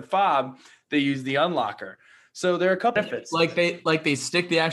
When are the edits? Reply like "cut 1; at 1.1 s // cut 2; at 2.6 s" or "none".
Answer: cut 1; at 3.0 s